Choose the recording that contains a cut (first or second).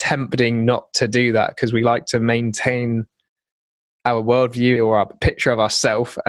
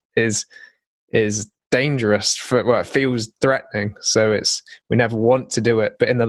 first